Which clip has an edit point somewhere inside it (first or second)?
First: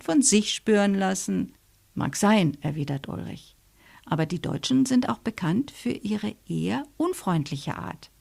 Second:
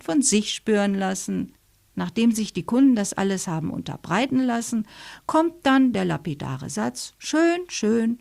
second